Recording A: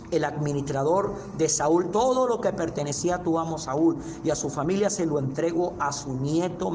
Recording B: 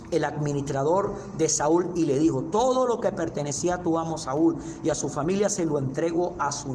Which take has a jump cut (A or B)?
A